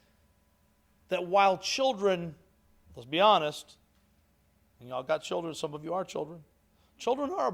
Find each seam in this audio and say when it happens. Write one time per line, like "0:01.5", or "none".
none